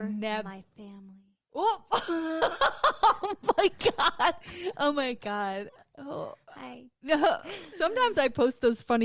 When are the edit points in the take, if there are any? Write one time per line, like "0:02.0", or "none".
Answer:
0:07.7